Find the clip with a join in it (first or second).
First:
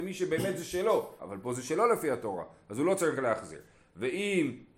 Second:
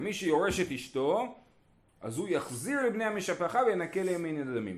first